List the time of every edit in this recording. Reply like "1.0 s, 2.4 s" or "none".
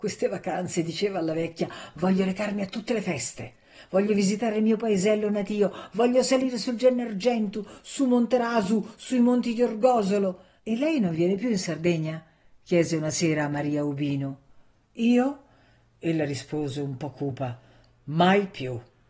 10.6 s